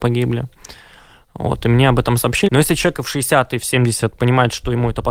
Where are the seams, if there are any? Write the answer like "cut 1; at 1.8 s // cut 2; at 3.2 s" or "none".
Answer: cut 1; at 2.5 s